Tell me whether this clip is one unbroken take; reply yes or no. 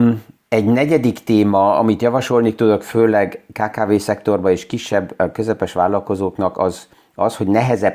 yes